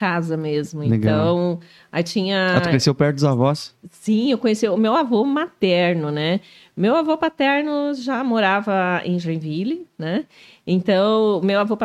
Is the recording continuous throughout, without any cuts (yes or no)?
yes